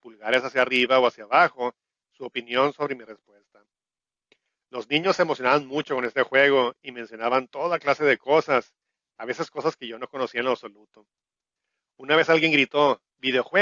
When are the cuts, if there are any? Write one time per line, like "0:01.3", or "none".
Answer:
none